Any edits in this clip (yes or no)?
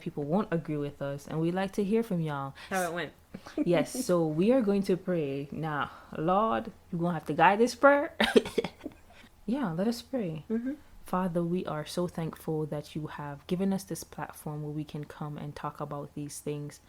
yes